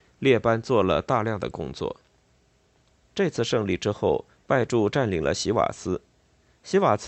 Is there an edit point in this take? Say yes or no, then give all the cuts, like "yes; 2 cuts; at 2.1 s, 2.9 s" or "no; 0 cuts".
yes; 1 cut; at 2.9 s